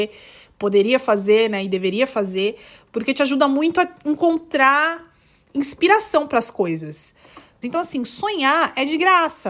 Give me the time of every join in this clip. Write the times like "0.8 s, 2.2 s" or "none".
7.6 s